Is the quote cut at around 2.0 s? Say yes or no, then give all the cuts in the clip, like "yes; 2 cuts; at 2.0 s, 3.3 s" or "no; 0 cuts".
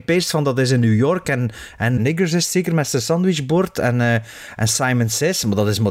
yes; 1 cut; at 2.0 s